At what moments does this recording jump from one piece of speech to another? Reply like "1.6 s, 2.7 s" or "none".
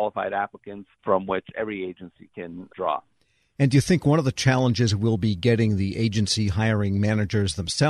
none